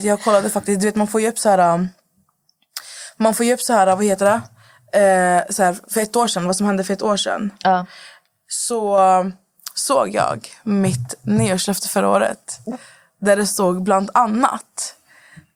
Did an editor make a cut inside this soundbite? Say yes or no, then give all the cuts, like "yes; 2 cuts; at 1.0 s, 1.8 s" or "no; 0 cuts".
no; 0 cuts